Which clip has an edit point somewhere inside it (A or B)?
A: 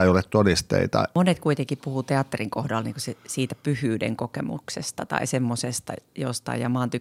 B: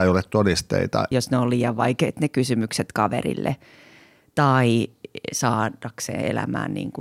B